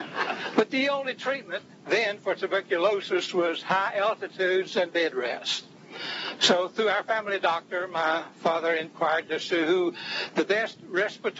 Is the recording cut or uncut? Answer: cut